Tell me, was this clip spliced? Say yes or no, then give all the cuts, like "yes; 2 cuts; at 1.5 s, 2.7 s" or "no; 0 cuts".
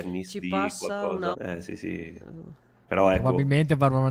yes; 1 cut; at 1.3 s